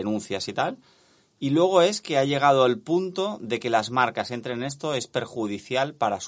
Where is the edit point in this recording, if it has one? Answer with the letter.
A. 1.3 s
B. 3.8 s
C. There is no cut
C